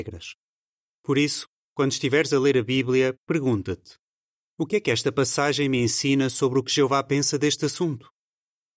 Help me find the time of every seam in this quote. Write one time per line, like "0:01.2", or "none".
none